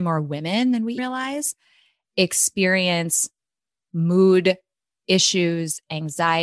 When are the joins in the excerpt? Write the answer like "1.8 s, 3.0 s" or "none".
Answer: 1.0 s